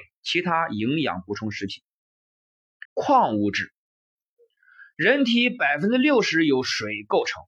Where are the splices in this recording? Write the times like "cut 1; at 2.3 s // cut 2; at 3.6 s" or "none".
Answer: cut 1; at 2.9 s

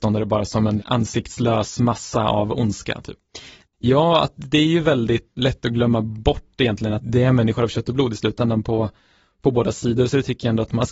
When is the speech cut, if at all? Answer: cut 1; at 3.6 s

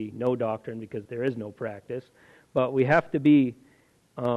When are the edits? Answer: cut 1; at 1.0 s

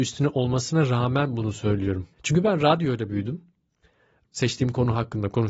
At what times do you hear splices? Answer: cut 1; at 2.1 s // cut 2; at 4.2 s

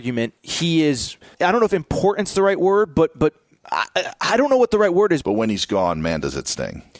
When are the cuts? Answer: cut 1; at 1.3 s // cut 2; at 5.2 s

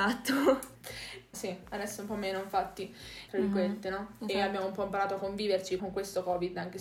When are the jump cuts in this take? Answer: cut 1; at 1.3 s // cut 2; at 3.3 s // cut 3; at 5.8 s

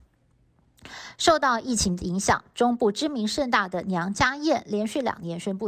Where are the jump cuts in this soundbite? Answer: none

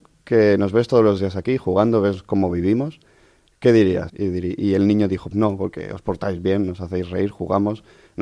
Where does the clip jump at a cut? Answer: cut 1; at 4.1 s // cut 2; at 5.3 s

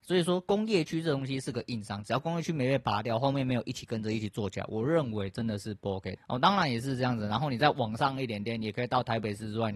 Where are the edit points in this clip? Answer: cut 1; at 6.2 s

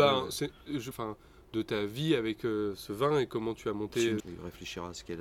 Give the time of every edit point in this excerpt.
cut 1; at 0.9 s // cut 2; at 4.2 s

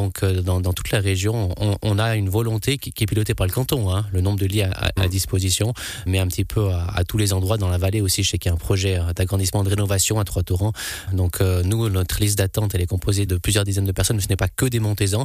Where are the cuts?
cut 1; at 6.1 s // cut 2; at 11.1 s // cut 3; at 13.3 s

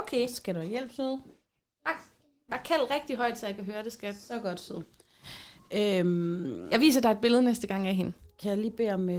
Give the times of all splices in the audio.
cut 1; at 2.5 s

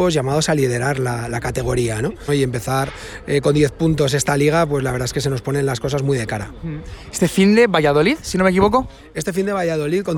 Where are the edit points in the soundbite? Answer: cut 1; at 2.3 s

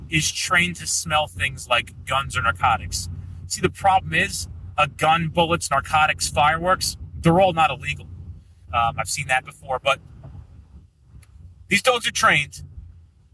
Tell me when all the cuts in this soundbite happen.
cut 1; at 8.7 s

